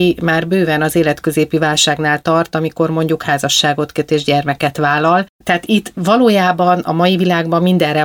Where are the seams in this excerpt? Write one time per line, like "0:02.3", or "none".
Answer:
none